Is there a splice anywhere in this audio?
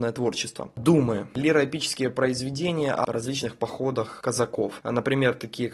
no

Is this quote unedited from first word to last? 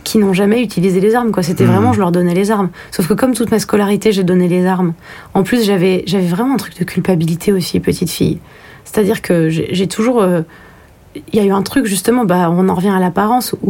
yes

